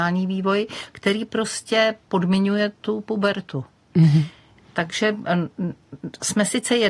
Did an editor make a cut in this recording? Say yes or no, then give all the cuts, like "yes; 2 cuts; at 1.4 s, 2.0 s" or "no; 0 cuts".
no; 0 cuts